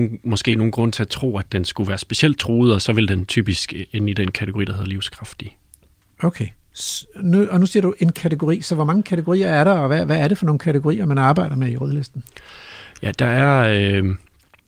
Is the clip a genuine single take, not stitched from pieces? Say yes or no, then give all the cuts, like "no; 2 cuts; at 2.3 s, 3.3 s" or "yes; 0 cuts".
yes; 0 cuts